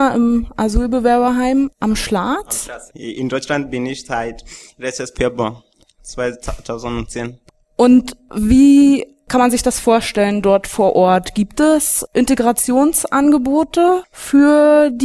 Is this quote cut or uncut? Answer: cut